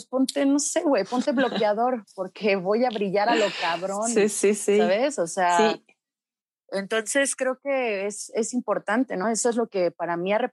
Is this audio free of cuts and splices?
yes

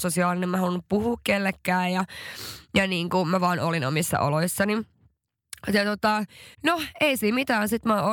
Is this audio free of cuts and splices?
no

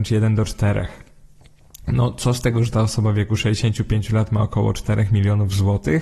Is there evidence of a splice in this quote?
no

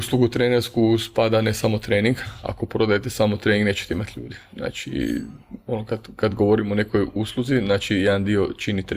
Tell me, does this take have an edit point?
no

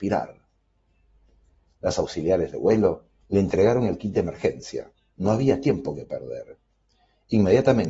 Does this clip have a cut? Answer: no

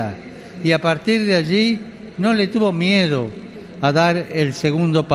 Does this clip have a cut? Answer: no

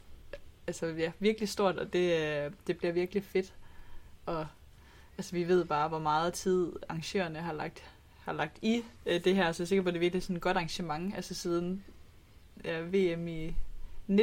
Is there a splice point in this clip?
yes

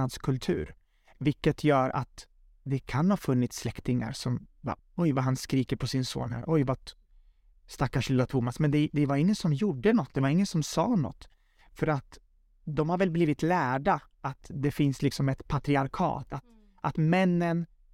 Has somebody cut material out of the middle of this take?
yes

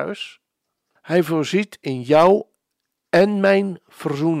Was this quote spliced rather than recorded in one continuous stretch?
yes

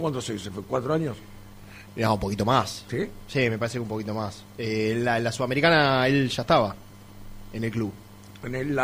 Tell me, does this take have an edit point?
no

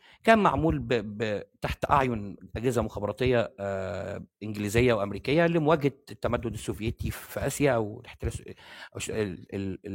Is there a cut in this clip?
no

